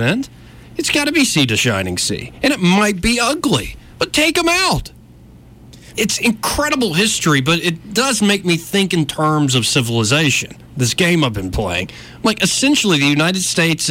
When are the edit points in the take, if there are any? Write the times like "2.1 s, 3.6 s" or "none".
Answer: 5.9 s